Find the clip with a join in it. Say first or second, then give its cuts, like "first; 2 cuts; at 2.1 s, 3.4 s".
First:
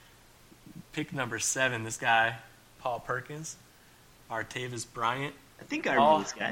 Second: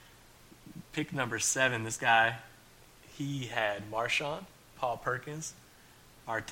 first; 1 cut; at 2.7 s